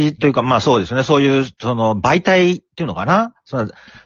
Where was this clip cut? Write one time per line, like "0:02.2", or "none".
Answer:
none